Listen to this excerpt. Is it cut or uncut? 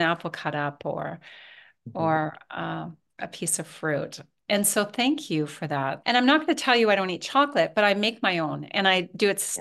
cut